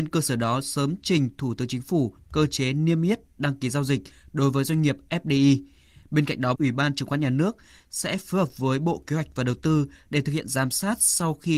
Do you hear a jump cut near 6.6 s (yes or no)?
yes